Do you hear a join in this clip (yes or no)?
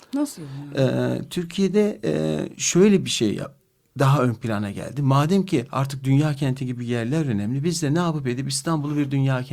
no